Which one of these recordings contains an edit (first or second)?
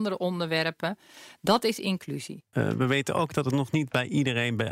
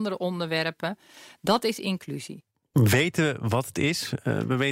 first